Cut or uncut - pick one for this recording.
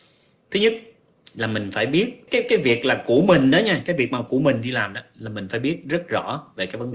cut